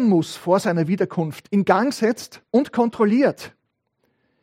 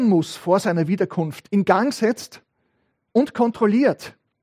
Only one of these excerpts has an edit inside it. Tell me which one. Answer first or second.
first